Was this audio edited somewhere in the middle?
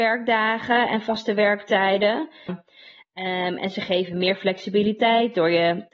yes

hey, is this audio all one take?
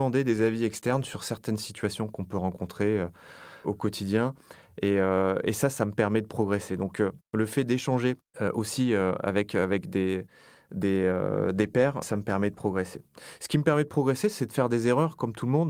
no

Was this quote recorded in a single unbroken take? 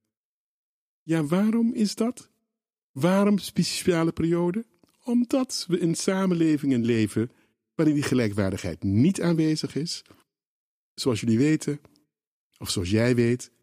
yes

